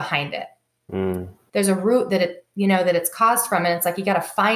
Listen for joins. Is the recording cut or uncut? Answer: cut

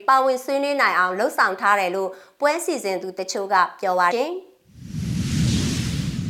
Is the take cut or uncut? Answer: cut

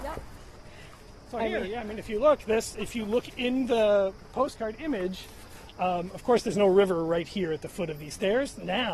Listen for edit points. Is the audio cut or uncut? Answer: uncut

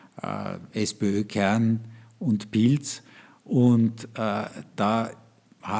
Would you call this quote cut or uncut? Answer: uncut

